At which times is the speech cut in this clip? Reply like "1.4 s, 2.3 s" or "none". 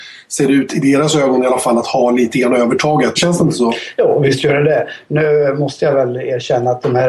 3.2 s